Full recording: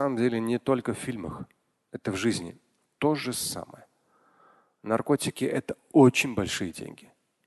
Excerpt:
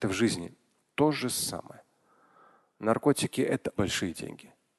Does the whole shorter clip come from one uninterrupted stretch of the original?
no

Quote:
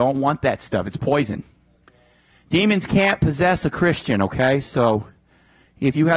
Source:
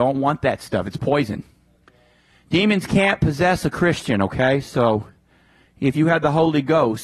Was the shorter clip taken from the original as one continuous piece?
yes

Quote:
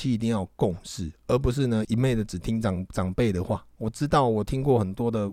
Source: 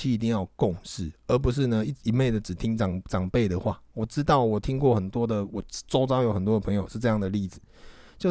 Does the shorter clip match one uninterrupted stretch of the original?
no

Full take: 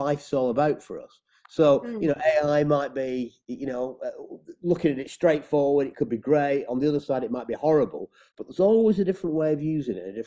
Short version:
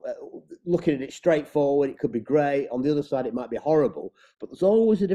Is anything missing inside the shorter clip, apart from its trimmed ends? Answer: no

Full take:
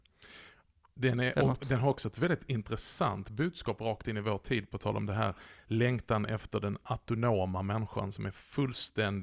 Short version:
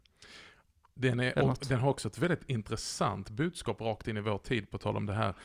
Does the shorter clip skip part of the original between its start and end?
no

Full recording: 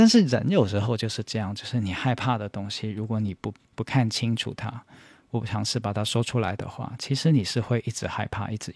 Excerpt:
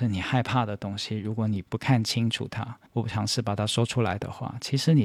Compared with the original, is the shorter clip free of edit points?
no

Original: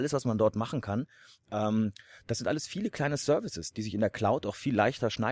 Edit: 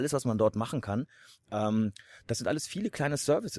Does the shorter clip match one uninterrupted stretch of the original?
yes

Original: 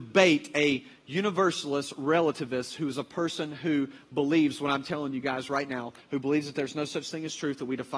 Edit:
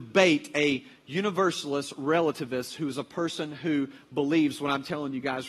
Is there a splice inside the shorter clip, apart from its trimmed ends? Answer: no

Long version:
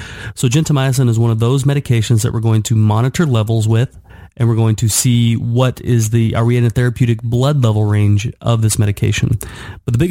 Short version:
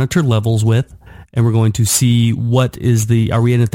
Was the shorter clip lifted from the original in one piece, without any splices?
yes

